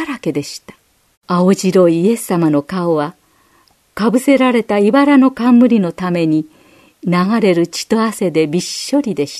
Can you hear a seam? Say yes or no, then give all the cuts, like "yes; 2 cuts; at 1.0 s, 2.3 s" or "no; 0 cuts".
yes; 1 cut; at 1.1 s